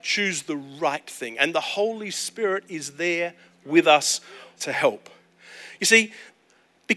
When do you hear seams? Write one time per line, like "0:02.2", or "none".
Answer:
0:04.6